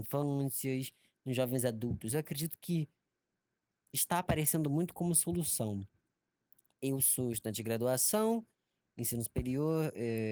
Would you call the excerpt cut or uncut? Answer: uncut